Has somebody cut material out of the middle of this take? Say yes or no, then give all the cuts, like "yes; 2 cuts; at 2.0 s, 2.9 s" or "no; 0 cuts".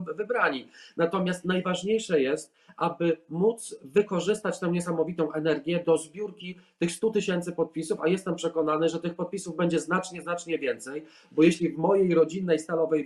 no; 0 cuts